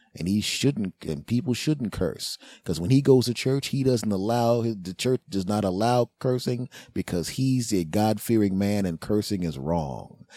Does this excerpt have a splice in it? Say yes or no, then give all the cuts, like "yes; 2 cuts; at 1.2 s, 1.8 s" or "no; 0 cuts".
no; 0 cuts